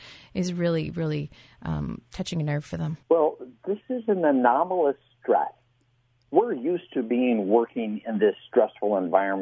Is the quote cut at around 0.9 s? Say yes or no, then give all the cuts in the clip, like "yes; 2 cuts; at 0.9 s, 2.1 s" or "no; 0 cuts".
no; 1 cut; at 3.0 s